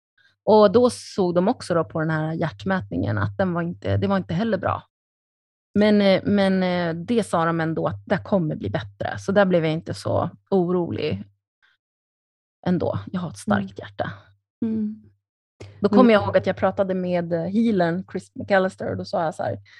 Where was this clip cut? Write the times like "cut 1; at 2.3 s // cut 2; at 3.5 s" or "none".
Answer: none